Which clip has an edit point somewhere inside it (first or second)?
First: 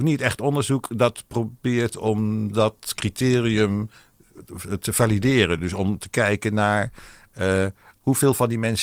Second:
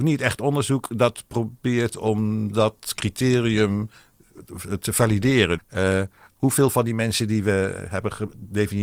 second